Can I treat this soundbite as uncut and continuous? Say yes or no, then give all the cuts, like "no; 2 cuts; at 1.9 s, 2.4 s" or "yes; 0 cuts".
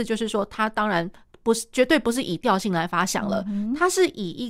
yes; 0 cuts